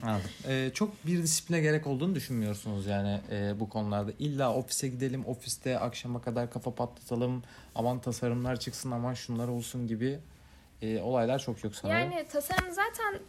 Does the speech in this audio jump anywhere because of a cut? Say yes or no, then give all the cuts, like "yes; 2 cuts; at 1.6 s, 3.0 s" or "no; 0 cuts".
no; 0 cuts